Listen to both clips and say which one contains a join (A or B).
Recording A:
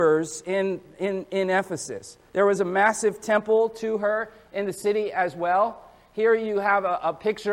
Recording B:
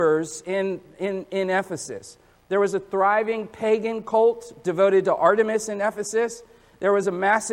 A